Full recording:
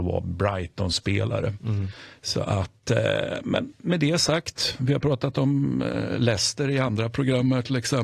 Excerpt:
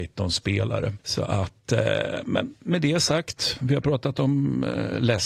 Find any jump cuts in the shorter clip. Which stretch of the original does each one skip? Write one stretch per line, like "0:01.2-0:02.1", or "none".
0:01.6-0:02.2

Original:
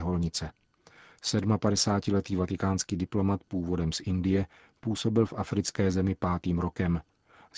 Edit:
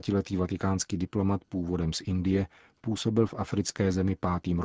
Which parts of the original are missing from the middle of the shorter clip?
none

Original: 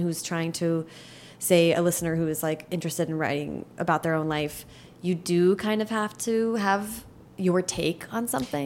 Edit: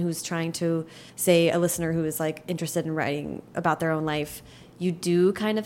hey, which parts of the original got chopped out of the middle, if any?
0:01.1-0:01.3

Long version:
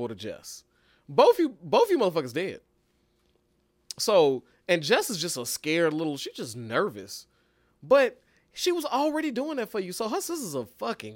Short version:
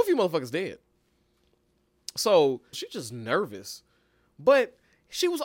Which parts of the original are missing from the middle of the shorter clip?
0:04.5-0:06.2

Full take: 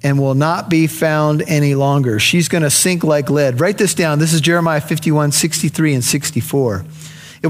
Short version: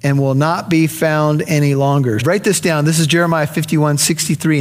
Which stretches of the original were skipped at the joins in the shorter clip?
0:02.2-0:03.5

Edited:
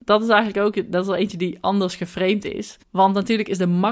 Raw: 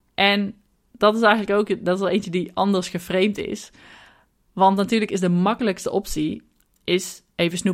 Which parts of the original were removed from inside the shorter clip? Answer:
0:03.7-0:04.4

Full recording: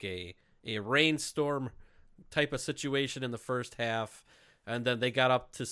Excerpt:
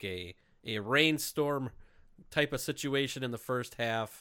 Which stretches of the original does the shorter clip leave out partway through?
none

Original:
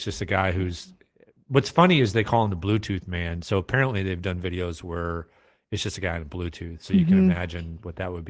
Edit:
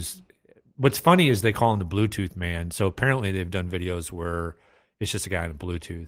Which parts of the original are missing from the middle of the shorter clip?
none

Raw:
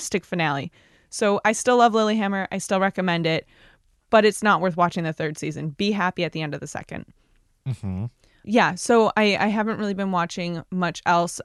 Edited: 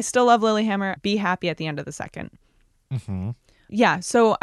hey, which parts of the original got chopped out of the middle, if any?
0:02.5-0:05.7

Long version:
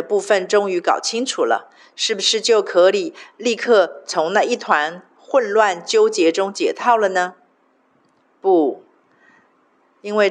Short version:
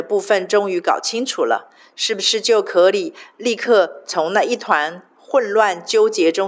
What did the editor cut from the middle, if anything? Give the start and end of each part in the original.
none

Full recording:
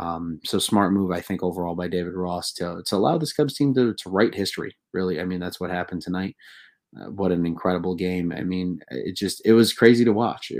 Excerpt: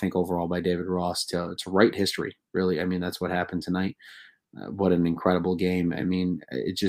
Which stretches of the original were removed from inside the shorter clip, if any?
0:02.8-0:04.0

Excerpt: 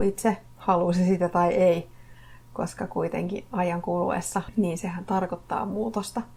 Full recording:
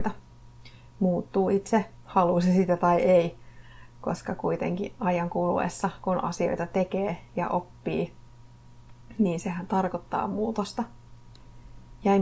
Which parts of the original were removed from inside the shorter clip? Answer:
0:06.0-0:09.1

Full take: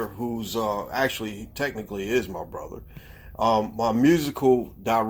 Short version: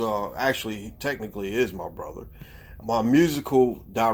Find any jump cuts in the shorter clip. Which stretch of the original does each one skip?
0:03.4-0:03.7

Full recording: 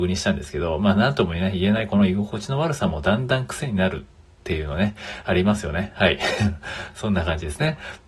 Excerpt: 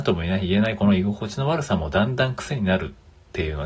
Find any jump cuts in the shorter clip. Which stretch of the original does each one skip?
none

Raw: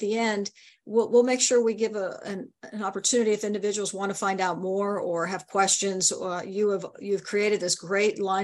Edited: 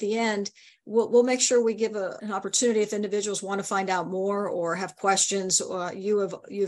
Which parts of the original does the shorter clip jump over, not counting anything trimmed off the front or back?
0:02.2-0:02.7

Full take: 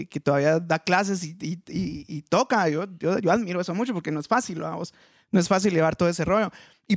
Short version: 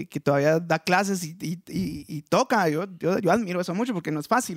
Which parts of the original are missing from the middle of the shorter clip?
none

